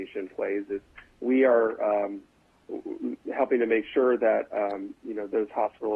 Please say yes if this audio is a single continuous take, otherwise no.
yes